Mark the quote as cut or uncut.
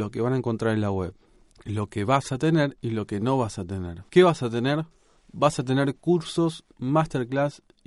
cut